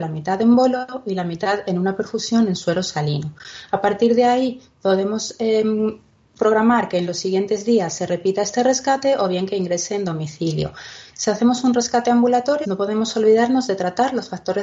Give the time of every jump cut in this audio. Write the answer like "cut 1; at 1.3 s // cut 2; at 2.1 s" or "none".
cut 1; at 11.1 s // cut 2; at 12.6 s